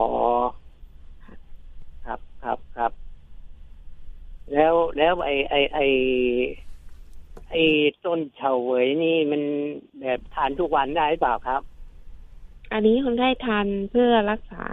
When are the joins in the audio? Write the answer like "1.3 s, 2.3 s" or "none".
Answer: 9.9 s